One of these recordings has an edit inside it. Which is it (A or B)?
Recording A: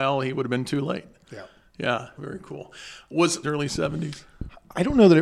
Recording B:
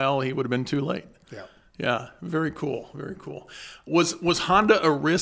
A